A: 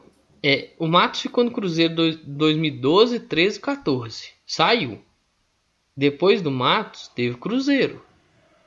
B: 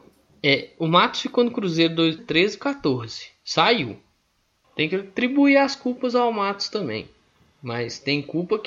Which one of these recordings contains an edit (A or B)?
B